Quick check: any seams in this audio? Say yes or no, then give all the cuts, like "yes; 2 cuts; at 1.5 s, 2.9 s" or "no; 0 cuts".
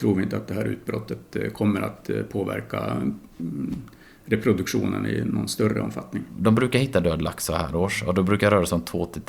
no; 0 cuts